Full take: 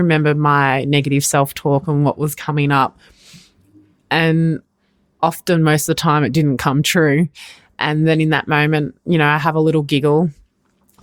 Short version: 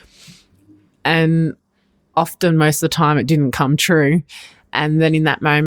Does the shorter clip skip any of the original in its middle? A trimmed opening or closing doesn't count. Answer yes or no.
no